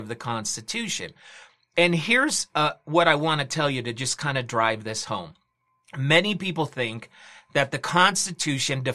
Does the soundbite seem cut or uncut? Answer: uncut